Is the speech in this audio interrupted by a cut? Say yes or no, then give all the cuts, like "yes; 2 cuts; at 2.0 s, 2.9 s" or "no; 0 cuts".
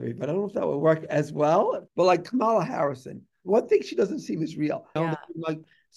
yes; 2 cuts; at 1.9 s, 5.0 s